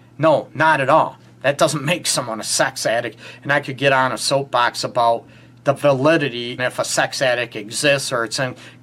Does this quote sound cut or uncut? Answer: cut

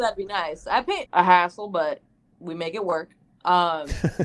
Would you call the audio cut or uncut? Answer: cut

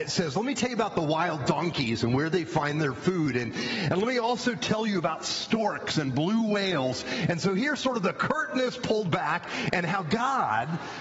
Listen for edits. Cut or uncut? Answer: uncut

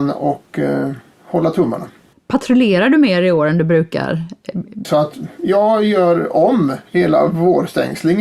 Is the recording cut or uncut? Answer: cut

